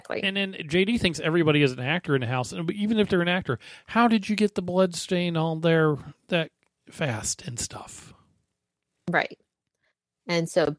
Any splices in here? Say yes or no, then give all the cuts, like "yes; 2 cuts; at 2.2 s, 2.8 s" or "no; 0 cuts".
no; 0 cuts